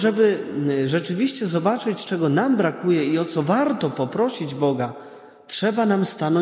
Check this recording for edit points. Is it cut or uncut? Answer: uncut